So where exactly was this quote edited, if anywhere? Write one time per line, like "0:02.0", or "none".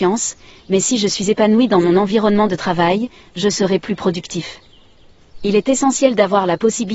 none